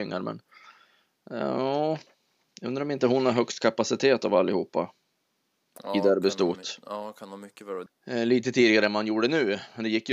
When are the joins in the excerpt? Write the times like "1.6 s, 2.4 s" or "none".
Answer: 7.9 s